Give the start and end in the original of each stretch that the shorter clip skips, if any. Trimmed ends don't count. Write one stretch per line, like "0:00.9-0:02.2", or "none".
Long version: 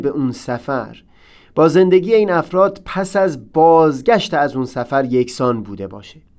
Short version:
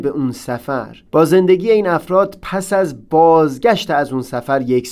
0:01.1-0:01.5